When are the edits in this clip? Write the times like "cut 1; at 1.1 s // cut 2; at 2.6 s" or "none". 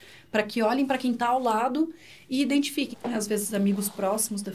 cut 1; at 2.9 s